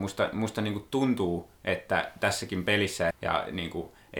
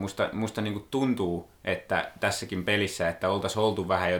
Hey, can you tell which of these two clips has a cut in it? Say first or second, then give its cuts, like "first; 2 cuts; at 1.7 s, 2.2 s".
first; 1 cut; at 3.1 s